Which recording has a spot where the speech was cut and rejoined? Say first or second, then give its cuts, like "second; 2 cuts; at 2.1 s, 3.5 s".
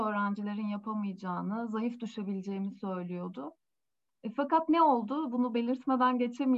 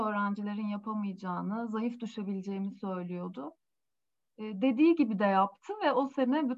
first; 1 cut; at 4.1 s